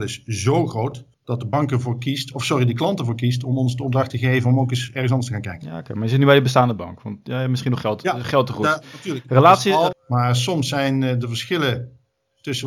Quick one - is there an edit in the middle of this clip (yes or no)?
yes